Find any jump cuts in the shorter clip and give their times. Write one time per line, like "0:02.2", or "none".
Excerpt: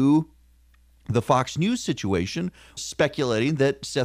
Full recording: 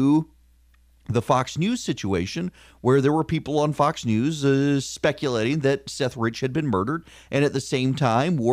0:02.8